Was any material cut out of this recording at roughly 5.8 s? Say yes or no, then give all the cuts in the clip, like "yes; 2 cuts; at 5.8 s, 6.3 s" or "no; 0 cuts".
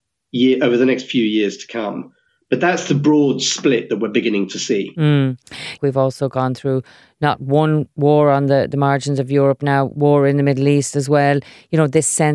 yes; 1 cut; at 5.8 s